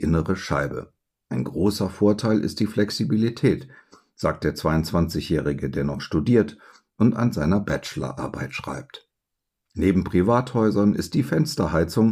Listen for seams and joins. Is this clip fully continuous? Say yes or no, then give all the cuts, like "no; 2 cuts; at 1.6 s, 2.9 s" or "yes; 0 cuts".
yes; 0 cuts